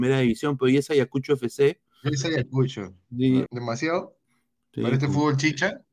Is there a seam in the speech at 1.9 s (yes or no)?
no